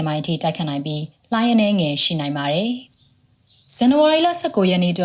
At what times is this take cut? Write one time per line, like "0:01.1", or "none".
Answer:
0:02.9